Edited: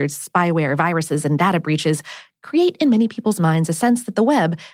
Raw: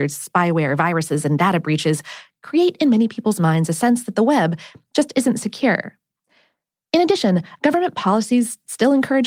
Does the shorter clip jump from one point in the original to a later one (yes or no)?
no